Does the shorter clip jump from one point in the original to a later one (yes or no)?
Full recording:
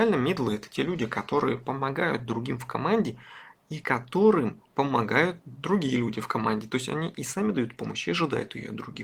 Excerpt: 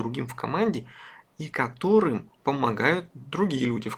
no